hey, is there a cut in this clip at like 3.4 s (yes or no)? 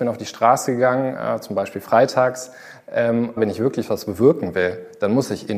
yes